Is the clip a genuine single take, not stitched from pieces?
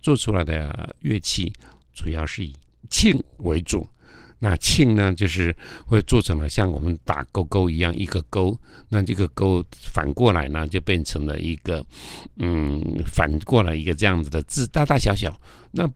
yes; 0 cuts

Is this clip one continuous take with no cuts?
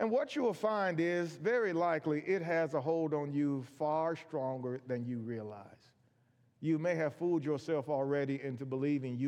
yes; 0 cuts

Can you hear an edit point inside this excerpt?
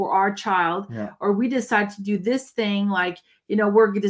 no; 0 cuts

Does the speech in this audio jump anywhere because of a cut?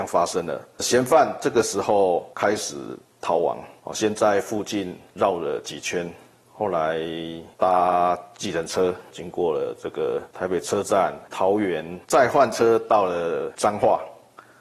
yes; 1 cut; at 12.0 s

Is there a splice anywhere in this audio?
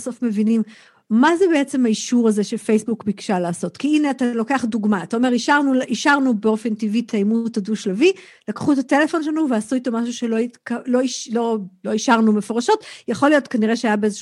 no; 0 cuts

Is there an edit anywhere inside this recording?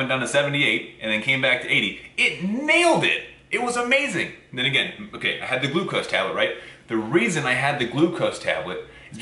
no; 0 cuts

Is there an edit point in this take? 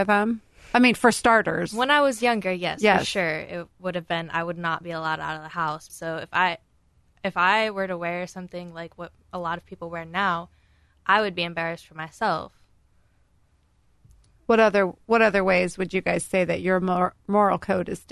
yes; 1 cut; at 5.9 s

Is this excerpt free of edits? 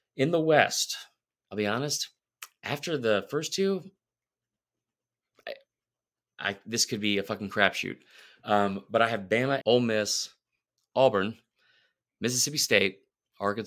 no; 1 cut; at 9.6 s

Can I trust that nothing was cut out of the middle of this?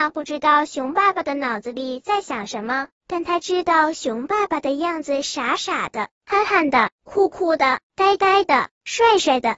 yes; 0 cuts

